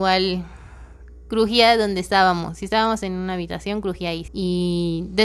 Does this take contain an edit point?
yes; 1 cut; at 4.3 s

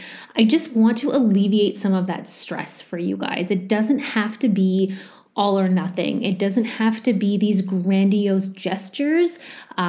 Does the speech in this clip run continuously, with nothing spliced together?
yes; 0 cuts

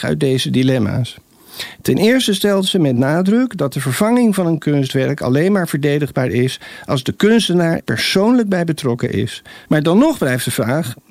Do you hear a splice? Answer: yes; 2 cuts; at 7.8 s, 9.7 s

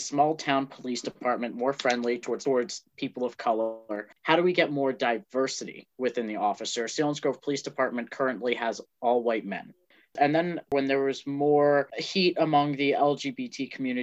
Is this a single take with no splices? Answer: no; 2 cuts; at 4.1 s, 10.1 s

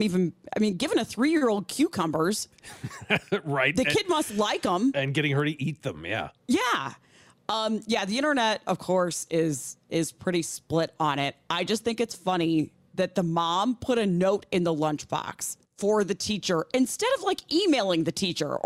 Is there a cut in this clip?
yes; 1 cut; at 15.6 s

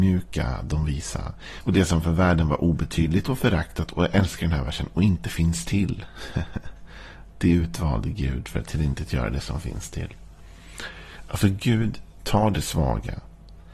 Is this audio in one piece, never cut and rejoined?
no; 1 cut; at 1.6 s

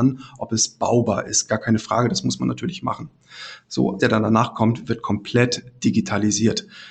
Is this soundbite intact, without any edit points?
no; 1 cut; at 4.0 s

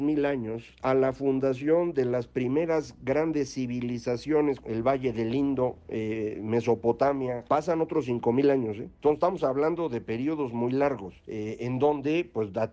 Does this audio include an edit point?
yes; 1 cut; at 4.6 s

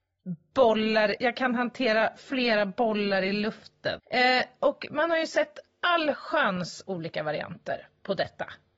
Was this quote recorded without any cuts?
no; 2 cuts; at 1.2 s, 4.0 s

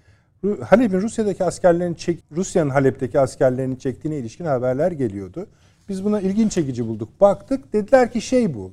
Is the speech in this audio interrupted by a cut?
yes; 1 cut; at 2.2 s

